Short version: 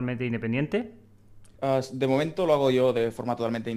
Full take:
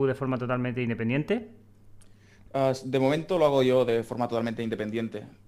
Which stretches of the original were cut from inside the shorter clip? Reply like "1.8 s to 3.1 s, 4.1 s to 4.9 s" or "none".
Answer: 2.1 s to 2.4 s